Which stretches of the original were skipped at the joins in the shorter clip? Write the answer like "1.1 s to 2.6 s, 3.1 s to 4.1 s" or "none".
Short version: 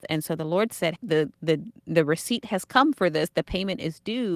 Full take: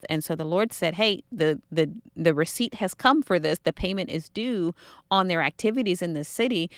1.0 s to 1.2 s